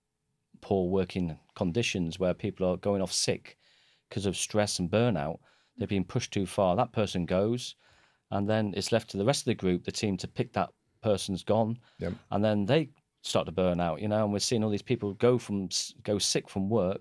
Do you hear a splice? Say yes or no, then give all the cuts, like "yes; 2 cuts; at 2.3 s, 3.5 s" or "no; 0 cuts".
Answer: no; 0 cuts